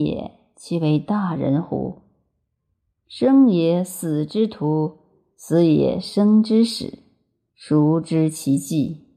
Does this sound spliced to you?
no; 0 cuts

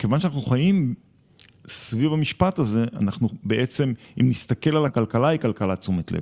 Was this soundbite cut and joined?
yes; 1 cut; at 4.9 s

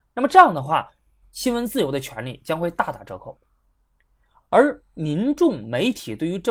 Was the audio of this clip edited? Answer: yes; 1 cut; at 1.2 s

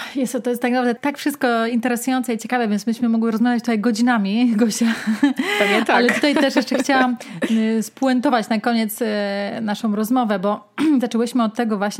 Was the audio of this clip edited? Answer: yes; 1 cut; at 1.0 s

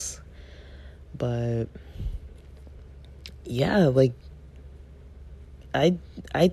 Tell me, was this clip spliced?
no; 0 cuts

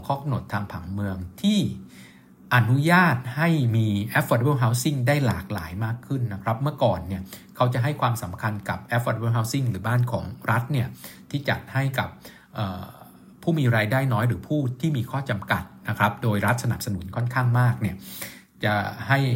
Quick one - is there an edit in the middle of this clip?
no; 0 cuts

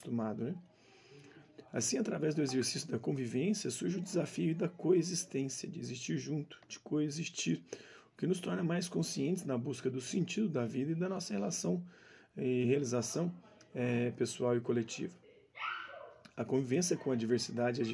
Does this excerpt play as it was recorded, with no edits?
yes; 0 cuts

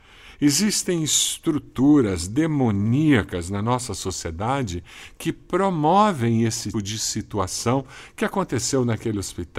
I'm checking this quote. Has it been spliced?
yes; 1 cut; at 6.7 s

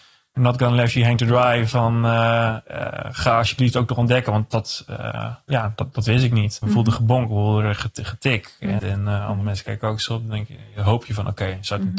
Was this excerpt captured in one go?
no; 2 cuts; at 6.6 s, 8.8 s

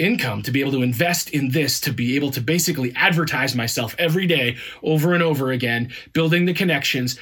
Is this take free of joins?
yes; 0 cuts

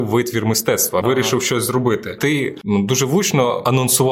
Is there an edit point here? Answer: yes; 2 cuts; at 1.0 s, 2.2 s

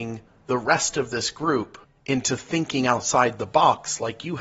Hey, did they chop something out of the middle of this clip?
no; 0 cuts

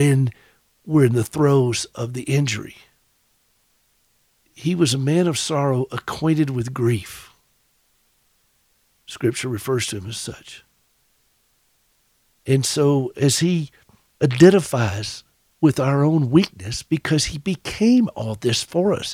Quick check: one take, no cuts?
yes; 0 cuts

